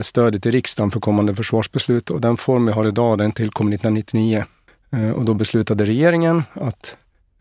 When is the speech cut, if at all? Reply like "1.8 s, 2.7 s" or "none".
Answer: none